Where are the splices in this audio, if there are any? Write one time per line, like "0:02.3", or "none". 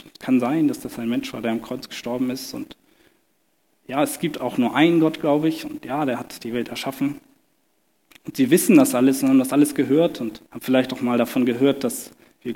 0:10.4